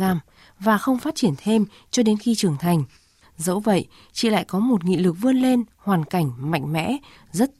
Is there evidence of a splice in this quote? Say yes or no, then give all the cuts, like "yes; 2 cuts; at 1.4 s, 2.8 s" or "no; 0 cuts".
yes; 1 cut; at 3.2 s